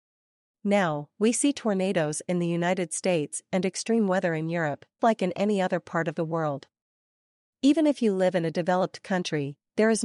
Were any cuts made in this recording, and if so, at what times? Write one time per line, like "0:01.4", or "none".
0:05.0